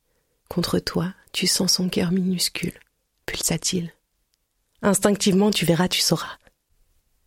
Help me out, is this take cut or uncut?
cut